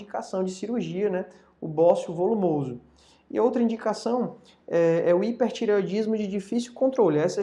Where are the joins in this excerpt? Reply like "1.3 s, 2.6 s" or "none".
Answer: none